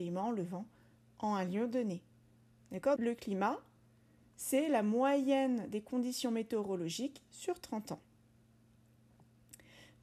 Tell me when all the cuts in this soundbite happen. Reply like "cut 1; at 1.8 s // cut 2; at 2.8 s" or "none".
cut 1; at 3.0 s